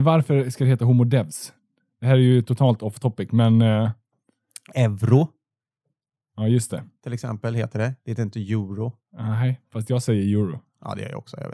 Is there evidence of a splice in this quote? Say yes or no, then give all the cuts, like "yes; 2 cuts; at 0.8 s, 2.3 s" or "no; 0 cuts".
no; 0 cuts